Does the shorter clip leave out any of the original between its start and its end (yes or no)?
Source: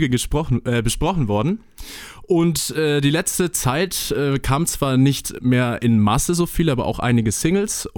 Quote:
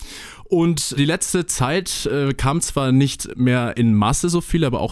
yes